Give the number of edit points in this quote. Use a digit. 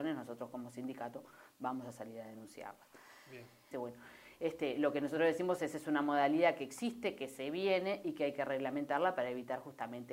1